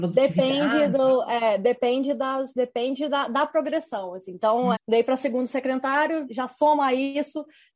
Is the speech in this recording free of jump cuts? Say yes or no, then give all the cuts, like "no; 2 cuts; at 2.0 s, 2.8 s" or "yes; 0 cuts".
no; 2 cuts; at 4.7 s, 6.2 s